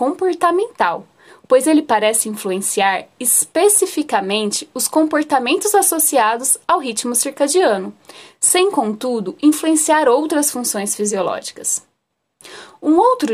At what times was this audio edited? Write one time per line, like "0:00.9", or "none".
none

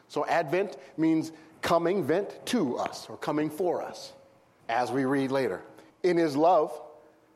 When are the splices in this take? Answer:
0:04.6
0:05.9

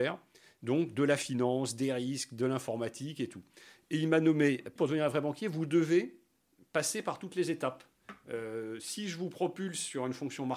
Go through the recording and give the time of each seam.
0:04.8

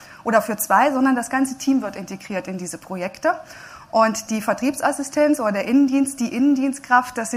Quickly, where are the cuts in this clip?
none

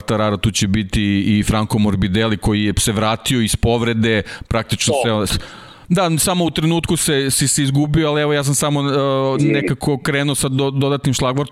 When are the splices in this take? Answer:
0:05.3

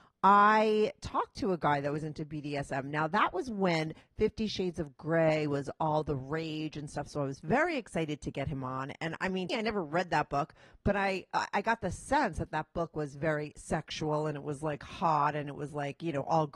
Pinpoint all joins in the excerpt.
0:09.5

